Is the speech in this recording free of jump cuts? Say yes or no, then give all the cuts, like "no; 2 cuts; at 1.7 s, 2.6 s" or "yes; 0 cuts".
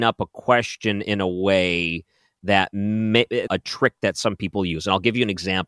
no; 1 cut; at 3.5 s